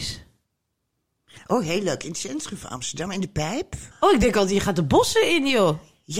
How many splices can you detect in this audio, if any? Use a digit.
1